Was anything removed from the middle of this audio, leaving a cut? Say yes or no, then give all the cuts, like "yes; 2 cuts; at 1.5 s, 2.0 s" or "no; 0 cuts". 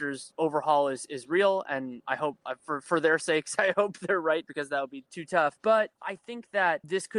yes; 2 cuts; at 4.5 s, 5.9 s